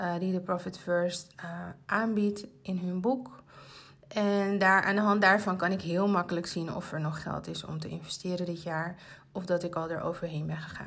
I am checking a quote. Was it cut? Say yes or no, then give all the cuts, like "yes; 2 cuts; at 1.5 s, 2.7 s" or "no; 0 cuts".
no; 0 cuts